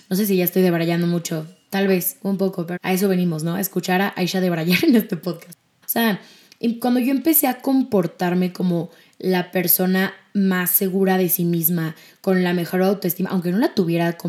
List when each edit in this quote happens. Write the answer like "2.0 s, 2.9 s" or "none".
2.8 s, 5.8 s